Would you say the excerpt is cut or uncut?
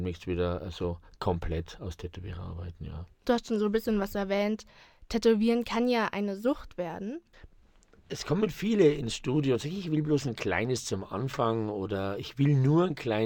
uncut